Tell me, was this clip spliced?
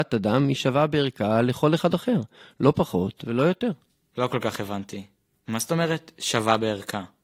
no; 0 cuts

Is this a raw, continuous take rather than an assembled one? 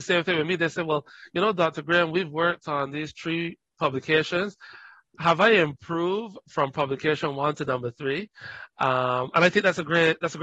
yes; 0 cuts

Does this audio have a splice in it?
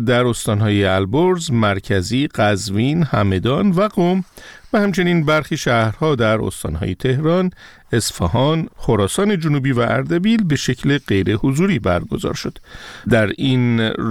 yes; 2 cuts; at 8.7 s, 13.0 s

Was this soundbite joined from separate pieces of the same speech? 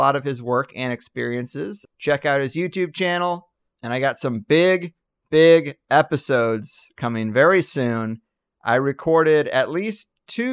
yes; 2 cuts; at 1.8 s, 3.7 s

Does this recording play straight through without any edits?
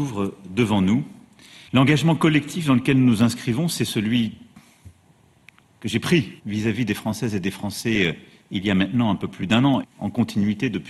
no; 3 cuts; at 1.7 s, 6.4 s, 9.8 s

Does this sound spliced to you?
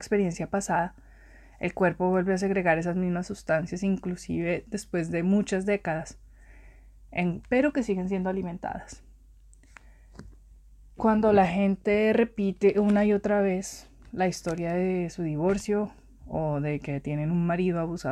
yes; 2 cuts; at 7.4 s, 11.0 s

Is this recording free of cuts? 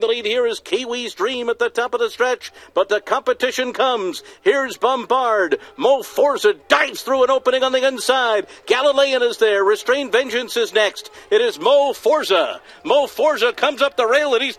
yes; 0 cuts

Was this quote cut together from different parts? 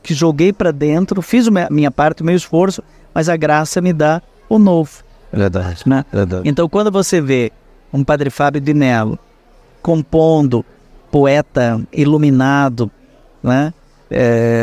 no; 0 cuts

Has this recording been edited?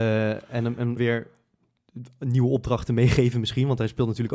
yes; 1 cut; at 1.0 s

